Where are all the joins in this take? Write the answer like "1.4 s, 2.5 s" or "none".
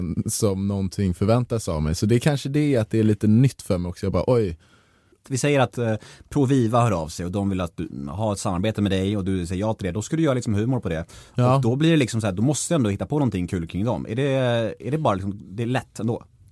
5.2 s